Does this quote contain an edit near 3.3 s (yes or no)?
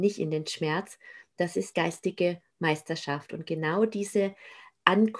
no